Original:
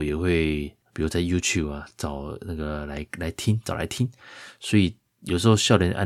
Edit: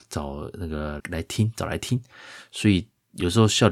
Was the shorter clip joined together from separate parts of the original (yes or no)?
yes